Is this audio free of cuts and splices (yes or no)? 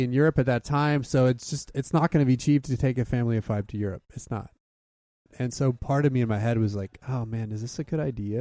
yes